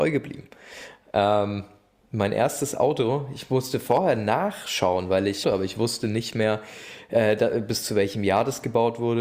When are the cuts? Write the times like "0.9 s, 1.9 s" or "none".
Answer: 5.4 s